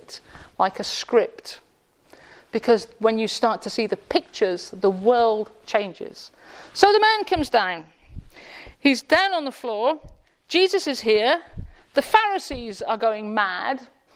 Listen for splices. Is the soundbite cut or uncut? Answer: uncut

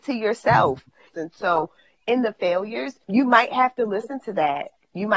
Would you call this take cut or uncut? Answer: cut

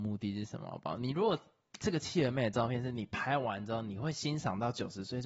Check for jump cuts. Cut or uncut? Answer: uncut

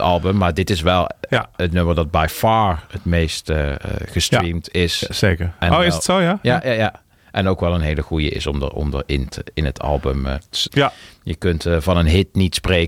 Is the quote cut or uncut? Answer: cut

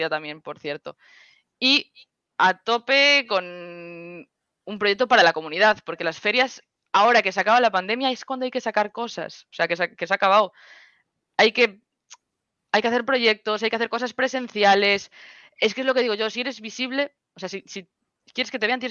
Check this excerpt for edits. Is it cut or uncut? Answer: uncut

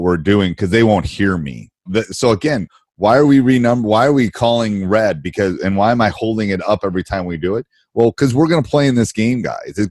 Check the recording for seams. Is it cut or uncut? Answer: cut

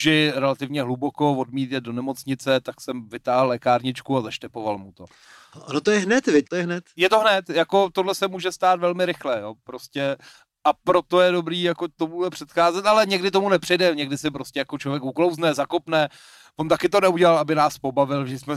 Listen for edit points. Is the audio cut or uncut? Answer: cut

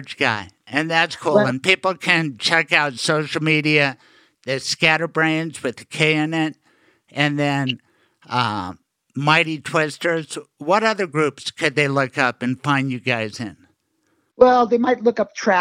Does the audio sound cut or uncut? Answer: uncut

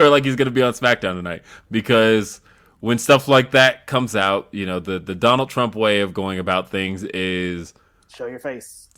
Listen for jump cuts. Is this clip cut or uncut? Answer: uncut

